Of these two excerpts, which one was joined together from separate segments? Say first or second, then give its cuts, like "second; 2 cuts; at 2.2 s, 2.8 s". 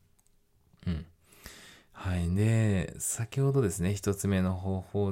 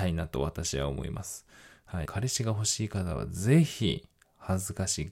second; 1 cut; at 2.1 s